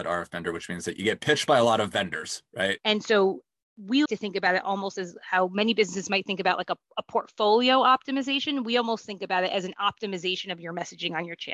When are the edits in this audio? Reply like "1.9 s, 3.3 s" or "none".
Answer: 2.8 s, 4.1 s